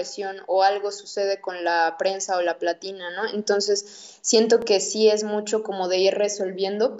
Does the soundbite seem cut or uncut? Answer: uncut